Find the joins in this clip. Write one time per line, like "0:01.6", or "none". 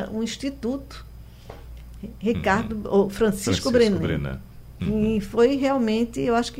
none